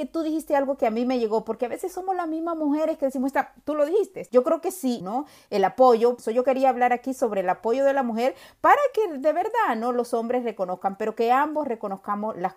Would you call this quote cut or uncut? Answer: cut